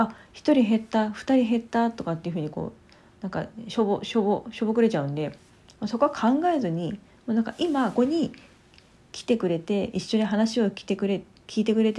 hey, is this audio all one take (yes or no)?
no